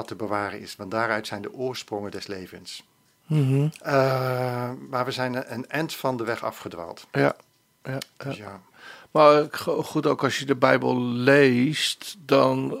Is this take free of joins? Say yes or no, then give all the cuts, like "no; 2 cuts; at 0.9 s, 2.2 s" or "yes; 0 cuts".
no; 1 cut; at 3.8 s